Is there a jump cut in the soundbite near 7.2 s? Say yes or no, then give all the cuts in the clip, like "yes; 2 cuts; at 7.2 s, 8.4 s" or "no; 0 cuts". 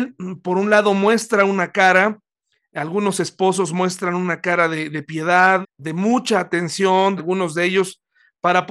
yes; 2 cuts; at 5.6 s, 7.2 s